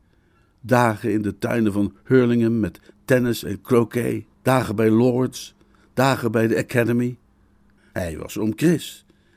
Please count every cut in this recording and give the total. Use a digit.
2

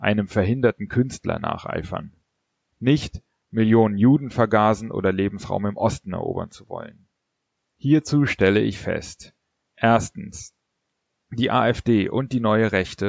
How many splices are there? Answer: 1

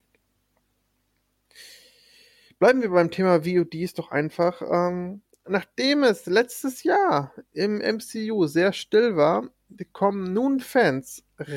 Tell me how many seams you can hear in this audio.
0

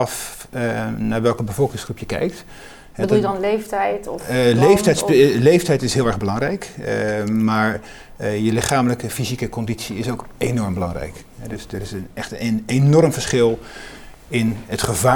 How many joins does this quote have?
0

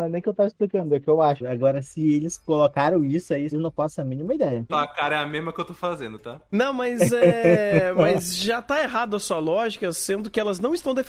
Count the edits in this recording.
3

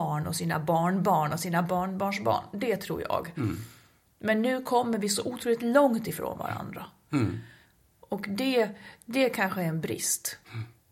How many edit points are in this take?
0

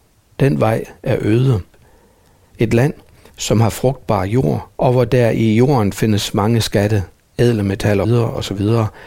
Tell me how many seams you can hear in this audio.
3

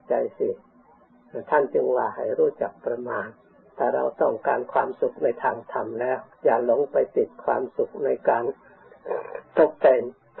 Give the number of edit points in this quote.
1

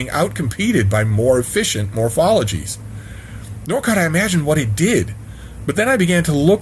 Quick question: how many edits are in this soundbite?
0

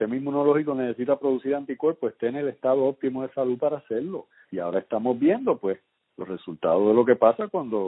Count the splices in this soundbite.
1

